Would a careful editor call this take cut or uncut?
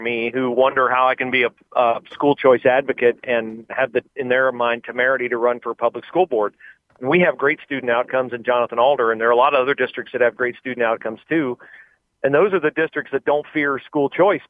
cut